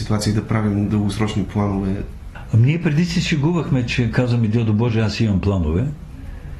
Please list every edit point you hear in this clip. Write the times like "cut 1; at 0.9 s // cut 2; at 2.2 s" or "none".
none